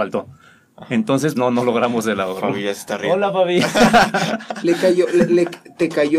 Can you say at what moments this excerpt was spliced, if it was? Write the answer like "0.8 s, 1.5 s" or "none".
1.3 s